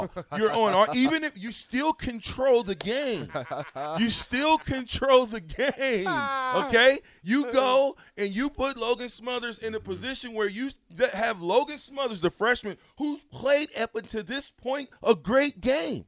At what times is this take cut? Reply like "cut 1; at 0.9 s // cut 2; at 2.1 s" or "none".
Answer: none

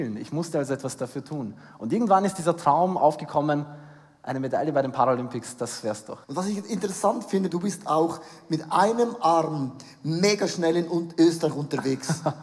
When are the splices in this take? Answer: cut 1; at 6.2 s // cut 2; at 7.5 s

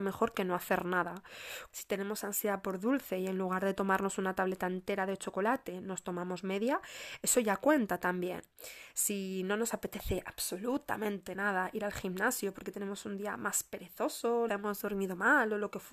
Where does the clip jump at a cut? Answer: cut 1; at 1.7 s // cut 2; at 14.5 s

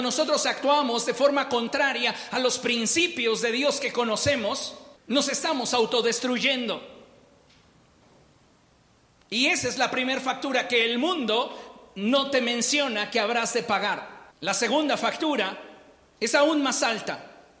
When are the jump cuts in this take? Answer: cut 1; at 5.0 s // cut 2; at 14.3 s

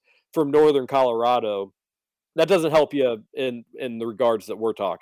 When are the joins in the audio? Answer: none

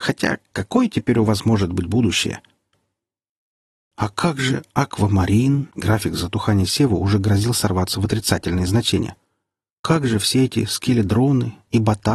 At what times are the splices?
cut 1; at 5.7 s

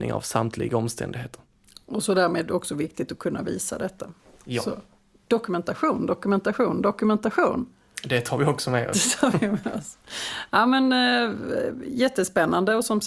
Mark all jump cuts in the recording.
none

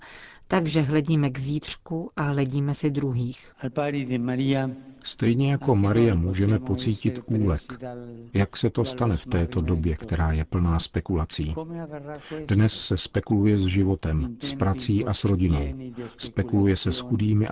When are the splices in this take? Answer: none

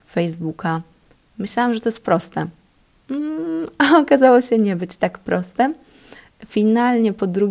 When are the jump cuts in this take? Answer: none

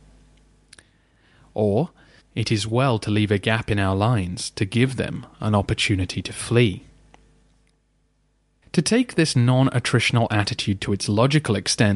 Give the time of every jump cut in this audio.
cut 1; at 2.2 s // cut 2; at 8.6 s

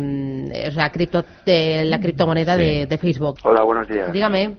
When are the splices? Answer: cut 1; at 0.9 s // cut 2; at 3.4 s

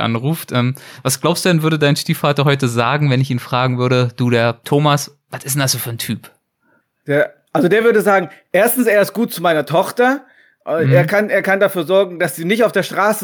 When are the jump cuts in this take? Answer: none

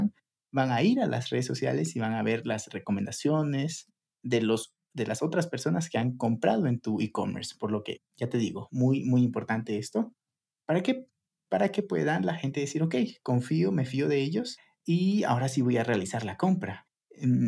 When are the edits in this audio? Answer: none

